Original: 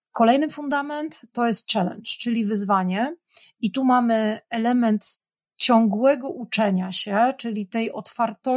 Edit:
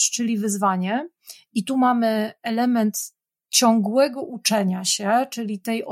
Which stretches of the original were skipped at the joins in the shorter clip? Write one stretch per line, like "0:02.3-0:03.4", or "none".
none